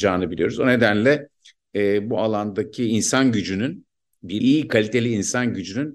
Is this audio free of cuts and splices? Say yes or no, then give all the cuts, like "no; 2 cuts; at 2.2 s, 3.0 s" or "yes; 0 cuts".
no; 1 cut; at 4.4 s